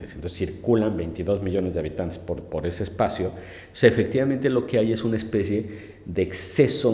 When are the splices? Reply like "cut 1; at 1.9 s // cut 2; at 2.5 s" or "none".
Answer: none